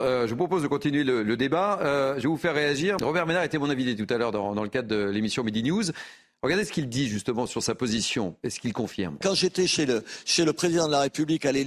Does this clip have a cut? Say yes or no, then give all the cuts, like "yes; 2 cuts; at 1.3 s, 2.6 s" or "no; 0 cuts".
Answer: yes; 2 cuts; at 3.0 s, 9.2 s